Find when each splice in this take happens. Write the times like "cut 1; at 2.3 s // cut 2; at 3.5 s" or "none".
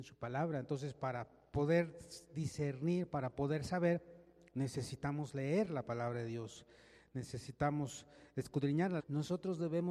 cut 1; at 9.0 s